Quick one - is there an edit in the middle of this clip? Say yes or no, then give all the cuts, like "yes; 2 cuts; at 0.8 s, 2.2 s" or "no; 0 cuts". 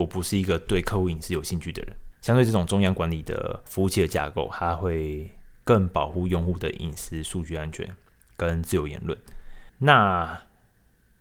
yes; 2 cuts; at 2.1 s, 9.7 s